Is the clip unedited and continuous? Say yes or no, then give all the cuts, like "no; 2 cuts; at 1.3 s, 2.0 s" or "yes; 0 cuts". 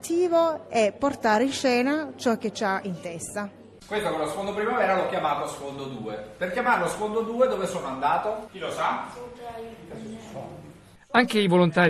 yes; 0 cuts